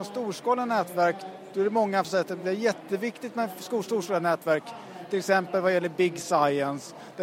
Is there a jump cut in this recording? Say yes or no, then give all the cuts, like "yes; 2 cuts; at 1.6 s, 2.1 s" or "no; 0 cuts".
yes; 1 cut; at 2.0 s